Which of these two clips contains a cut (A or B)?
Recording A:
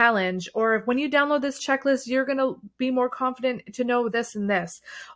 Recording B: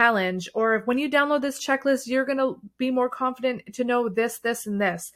A